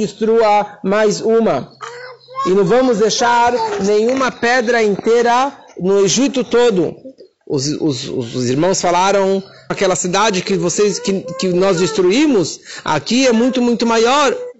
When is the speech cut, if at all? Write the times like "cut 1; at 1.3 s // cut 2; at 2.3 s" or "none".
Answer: cut 1; at 9.7 s